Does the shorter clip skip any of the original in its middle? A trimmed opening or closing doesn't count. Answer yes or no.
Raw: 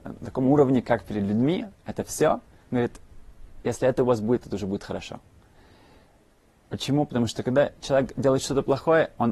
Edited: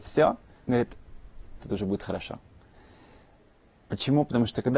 yes